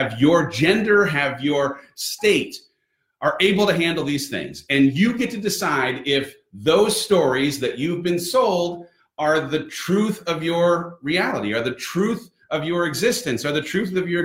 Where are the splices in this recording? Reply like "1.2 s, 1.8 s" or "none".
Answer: none